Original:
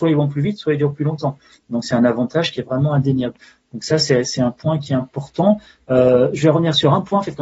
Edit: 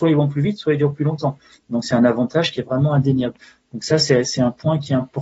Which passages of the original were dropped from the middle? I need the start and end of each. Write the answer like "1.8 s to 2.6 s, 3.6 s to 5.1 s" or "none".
none